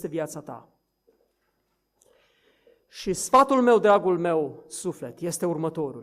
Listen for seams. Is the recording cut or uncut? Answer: uncut